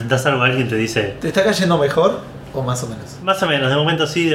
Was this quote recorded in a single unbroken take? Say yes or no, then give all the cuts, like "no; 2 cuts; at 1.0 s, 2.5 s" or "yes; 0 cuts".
yes; 0 cuts